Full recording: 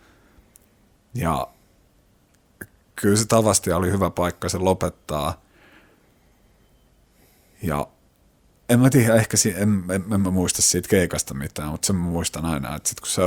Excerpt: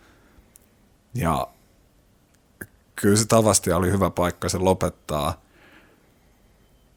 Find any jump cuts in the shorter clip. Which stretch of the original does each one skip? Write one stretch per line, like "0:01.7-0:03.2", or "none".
none